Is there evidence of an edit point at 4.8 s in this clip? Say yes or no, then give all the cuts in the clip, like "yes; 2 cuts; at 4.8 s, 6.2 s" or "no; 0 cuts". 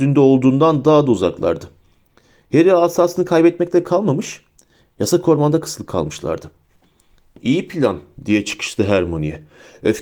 yes; 1 cut; at 4.8 s